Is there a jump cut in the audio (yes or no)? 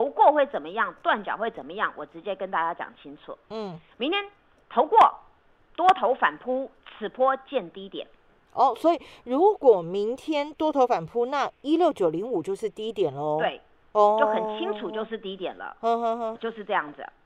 yes